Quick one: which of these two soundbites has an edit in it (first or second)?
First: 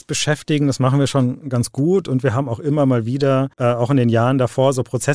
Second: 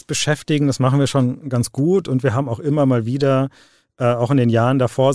first